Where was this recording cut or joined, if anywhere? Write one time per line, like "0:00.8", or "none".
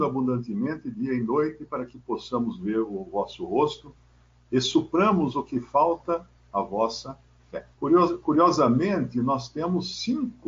0:07.7